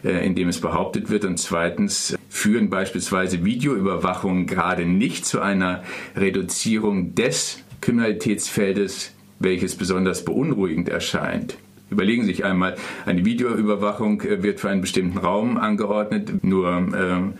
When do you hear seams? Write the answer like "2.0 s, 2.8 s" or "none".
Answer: 16.4 s